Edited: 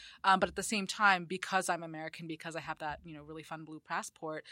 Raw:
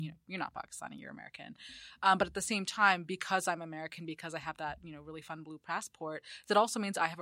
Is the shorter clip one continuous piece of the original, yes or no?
yes